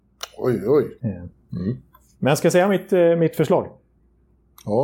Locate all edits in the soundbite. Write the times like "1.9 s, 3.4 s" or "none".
1.0 s

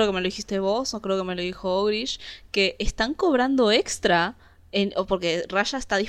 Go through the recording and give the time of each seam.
none

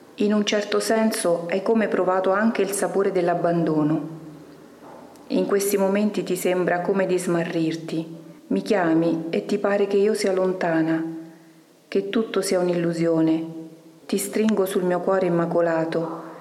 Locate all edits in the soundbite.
8.4 s, 14.0 s

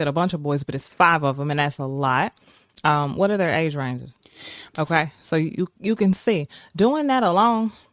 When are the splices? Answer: 4.7 s

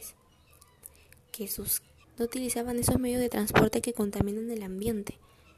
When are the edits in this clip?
2.0 s

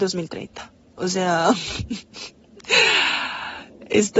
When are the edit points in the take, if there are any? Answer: none

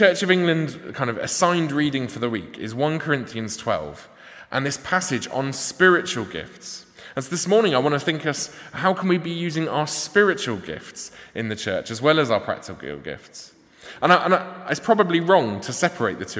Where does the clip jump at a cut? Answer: none

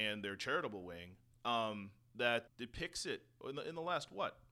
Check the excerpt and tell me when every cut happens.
1.3 s, 2.5 s

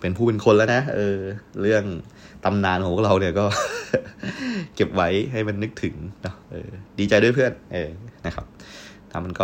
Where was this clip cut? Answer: none

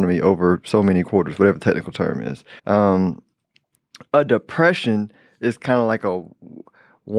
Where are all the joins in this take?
2.6 s

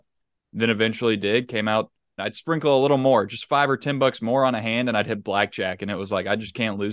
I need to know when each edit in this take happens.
2.2 s

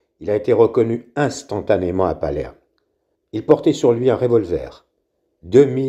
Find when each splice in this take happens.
3.2 s

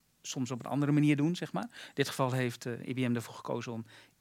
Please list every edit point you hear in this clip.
none

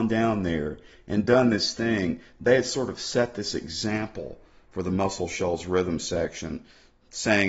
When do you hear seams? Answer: none

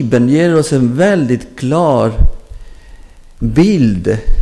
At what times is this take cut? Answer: none

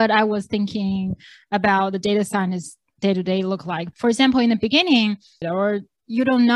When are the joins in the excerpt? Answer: 3.9 s, 5.4 s

